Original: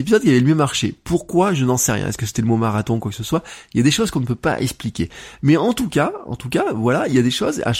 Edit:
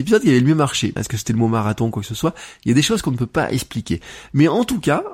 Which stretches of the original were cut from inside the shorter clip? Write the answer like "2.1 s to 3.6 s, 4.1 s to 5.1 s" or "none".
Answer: 1.0 s to 2.1 s